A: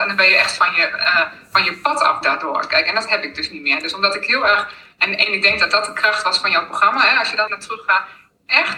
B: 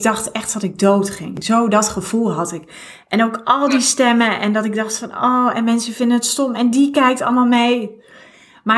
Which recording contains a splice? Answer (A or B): A